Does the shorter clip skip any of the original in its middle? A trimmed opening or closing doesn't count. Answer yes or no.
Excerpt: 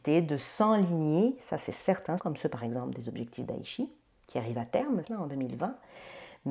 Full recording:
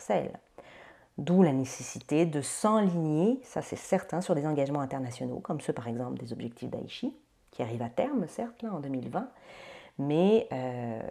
yes